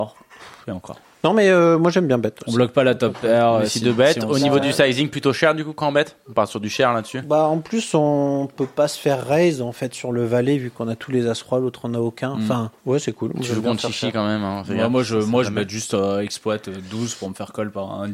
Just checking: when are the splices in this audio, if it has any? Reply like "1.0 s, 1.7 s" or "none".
12.8 s